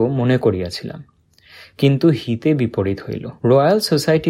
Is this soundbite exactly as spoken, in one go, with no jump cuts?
no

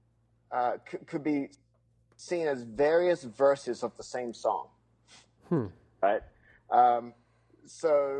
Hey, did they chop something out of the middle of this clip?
no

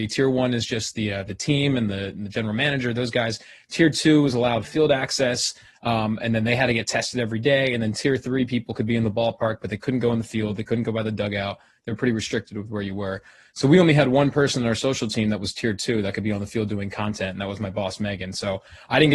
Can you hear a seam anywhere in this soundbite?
no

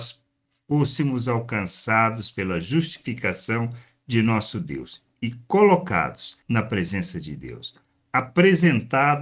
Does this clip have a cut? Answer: yes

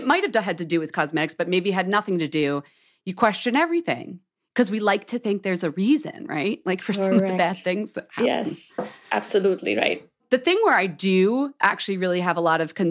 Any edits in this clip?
no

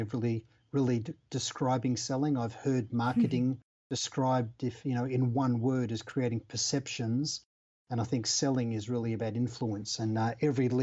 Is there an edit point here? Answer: no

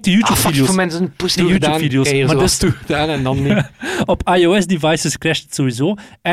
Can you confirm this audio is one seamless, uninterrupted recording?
no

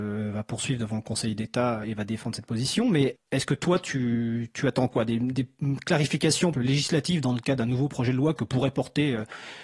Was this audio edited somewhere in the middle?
yes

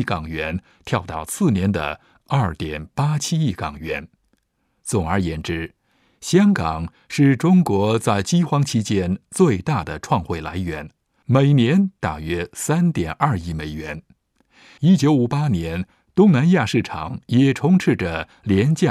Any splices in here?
no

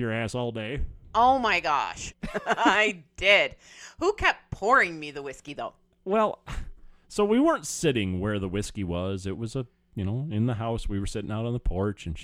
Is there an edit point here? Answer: yes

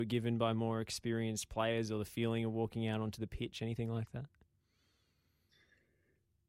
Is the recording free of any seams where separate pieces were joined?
yes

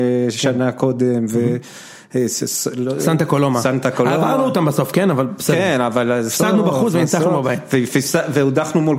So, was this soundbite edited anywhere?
no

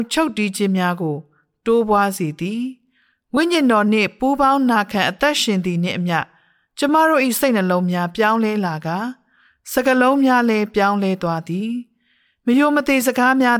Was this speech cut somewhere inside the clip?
no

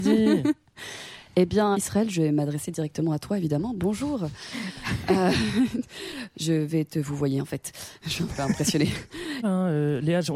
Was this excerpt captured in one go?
no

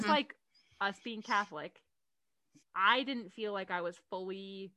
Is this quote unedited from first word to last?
no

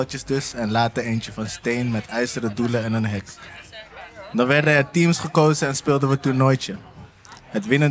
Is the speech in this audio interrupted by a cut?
no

